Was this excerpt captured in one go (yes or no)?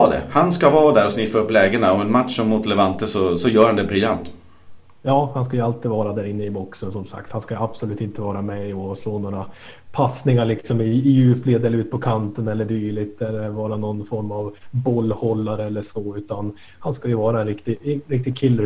yes